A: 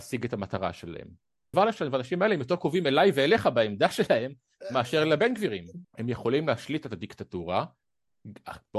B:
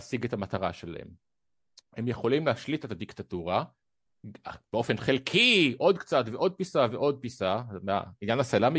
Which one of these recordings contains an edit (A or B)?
A